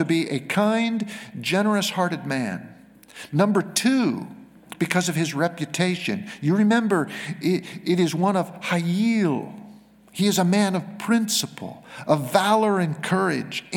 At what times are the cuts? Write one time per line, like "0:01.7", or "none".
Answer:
none